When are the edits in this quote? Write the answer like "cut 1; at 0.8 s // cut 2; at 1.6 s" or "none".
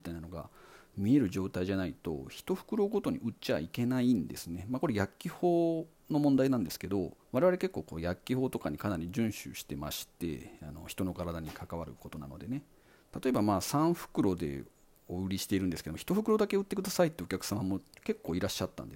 cut 1; at 7.2 s